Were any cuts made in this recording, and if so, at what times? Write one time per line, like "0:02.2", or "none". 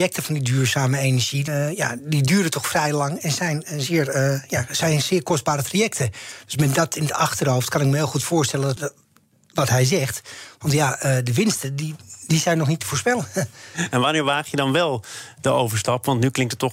0:01.5
0:08.8